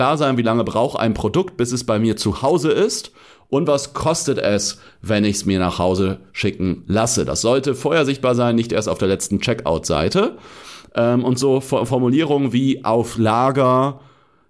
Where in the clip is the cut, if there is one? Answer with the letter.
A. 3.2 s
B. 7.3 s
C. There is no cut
C